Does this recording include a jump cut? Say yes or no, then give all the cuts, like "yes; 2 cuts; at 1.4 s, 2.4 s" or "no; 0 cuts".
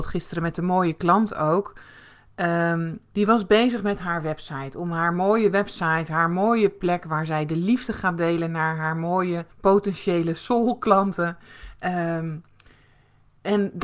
yes; 1 cut; at 9.5 s